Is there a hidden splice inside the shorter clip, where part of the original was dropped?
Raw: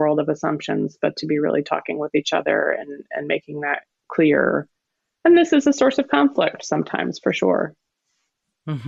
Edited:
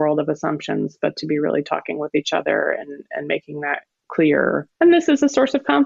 yes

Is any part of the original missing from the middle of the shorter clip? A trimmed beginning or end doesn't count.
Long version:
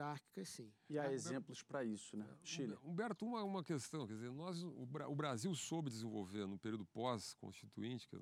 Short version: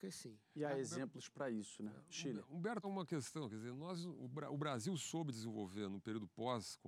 yes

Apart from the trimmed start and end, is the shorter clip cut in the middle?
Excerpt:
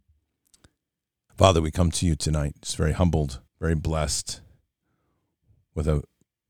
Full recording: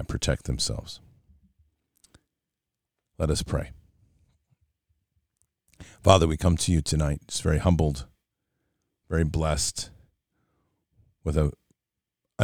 yes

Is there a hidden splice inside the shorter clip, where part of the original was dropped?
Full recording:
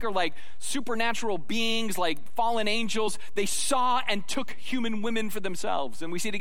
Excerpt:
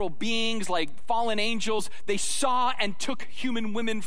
no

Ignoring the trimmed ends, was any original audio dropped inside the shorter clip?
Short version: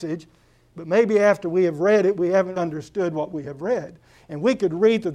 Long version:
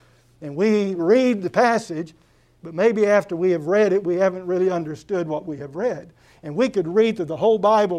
yes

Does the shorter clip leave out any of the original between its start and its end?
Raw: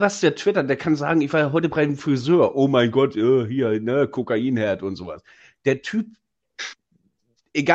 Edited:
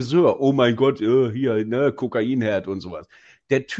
no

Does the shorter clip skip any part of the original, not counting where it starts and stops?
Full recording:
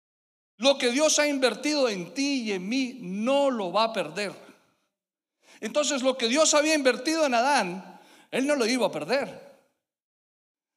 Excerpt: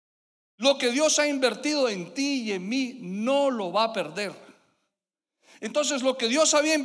no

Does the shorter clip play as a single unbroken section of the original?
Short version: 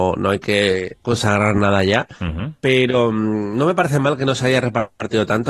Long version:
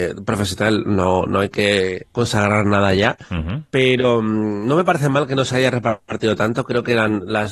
yes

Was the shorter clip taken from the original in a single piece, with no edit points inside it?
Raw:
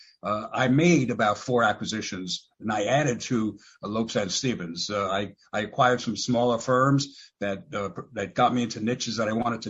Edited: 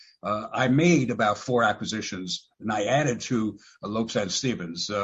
yes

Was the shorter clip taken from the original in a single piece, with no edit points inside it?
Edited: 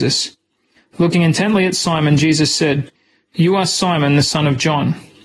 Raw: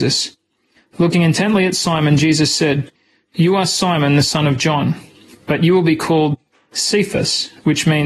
yes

